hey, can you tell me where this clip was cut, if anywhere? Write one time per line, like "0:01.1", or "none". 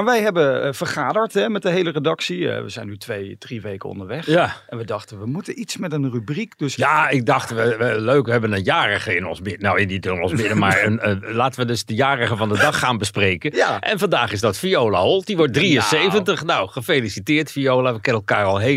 none